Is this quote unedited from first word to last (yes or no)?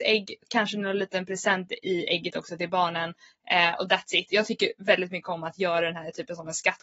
yes